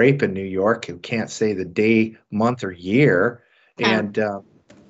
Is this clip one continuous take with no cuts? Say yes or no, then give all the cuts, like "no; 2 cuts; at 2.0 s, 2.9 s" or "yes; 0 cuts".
yes; 0 cuts